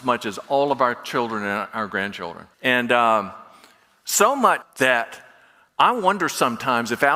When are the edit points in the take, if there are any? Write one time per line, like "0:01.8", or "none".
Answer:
0:02.5
0:04.6